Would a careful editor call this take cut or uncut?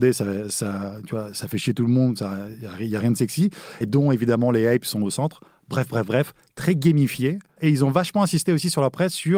cut